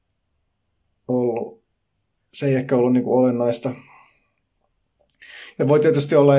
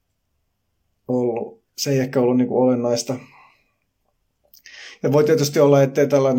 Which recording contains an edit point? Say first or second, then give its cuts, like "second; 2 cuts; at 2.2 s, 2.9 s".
second; 1 cut; at 1.7 s